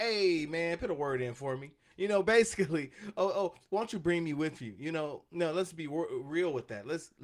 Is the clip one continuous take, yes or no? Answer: yes